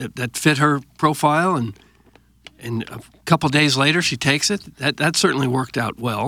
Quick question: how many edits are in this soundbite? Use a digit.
0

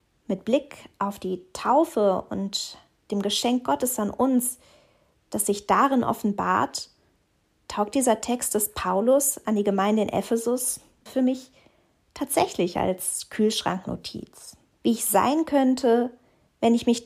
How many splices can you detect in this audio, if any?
2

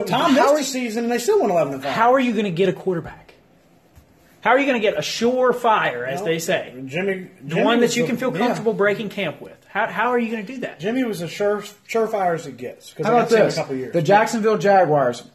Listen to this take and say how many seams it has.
0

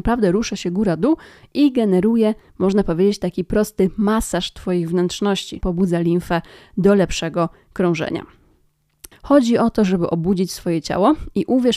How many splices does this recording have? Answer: 2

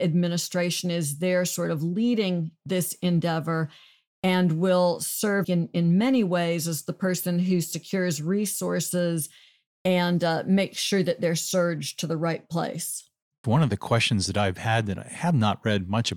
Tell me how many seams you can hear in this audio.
2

